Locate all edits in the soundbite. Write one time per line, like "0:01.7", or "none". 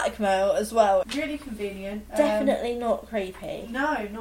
0:01.0

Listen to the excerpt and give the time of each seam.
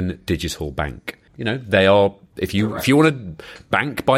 0:01.3

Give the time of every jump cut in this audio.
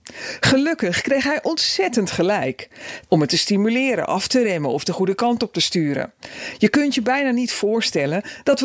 0:03.1

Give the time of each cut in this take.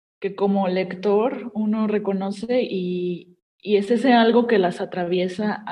none

